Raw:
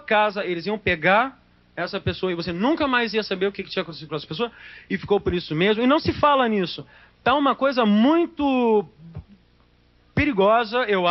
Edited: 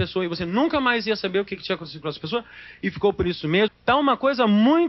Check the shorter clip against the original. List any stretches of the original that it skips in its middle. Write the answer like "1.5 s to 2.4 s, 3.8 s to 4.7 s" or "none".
5.7 s to 7.1 s